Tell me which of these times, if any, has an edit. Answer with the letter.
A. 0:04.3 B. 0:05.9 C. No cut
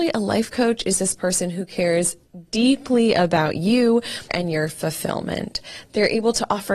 A